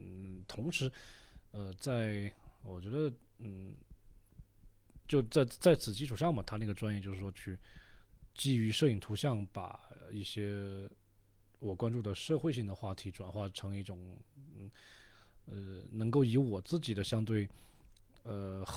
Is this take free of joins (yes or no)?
no